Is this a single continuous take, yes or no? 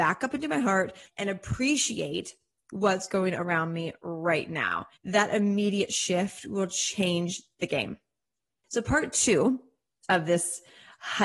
no